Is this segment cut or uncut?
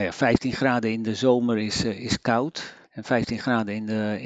cut